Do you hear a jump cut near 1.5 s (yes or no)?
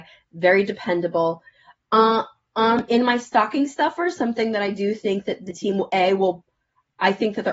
no